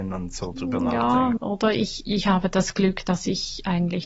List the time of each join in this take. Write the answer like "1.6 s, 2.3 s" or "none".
1.4 s